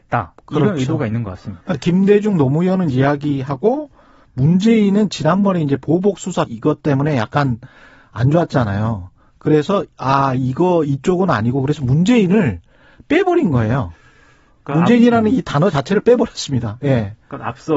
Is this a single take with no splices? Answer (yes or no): no